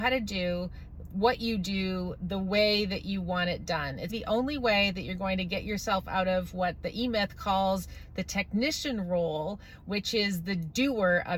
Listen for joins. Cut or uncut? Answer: cut